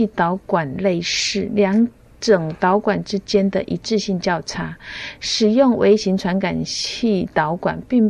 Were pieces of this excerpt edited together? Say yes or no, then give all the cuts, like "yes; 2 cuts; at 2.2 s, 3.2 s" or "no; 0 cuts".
no; 0 cuts